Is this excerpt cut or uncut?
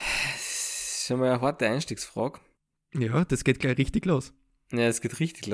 uncut